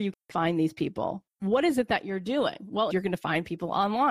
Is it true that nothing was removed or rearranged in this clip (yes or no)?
no